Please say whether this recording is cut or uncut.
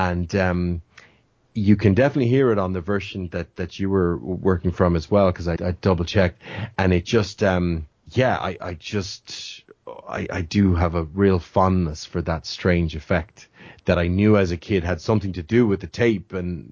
cut